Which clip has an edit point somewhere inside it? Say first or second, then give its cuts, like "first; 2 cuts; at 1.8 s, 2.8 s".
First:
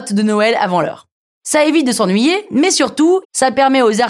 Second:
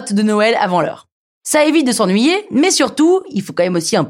first; 1 cut; at 3.2 s